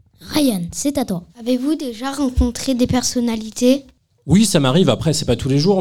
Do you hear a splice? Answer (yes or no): yes